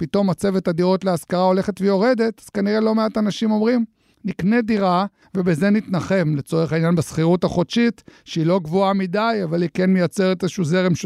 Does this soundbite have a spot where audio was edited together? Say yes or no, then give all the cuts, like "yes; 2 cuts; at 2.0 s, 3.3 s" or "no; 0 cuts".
yes; 1 cut; at 5.2 s